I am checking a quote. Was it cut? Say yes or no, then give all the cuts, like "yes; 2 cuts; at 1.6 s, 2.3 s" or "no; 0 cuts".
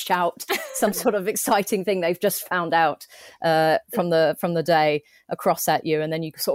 no; 0 cuts